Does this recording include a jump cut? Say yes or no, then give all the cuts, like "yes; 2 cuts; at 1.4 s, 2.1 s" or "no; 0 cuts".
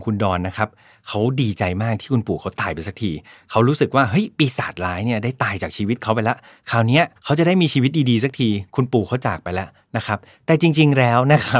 yes; 1 cut; at 7.2 s